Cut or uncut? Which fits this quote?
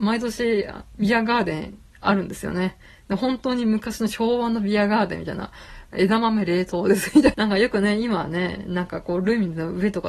cut